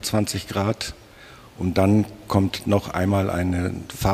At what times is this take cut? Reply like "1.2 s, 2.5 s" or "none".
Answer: none